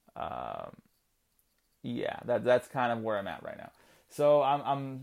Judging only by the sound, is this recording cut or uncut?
uncut